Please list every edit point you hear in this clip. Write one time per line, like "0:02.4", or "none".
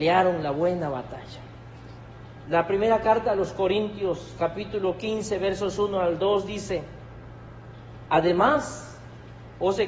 0:02.4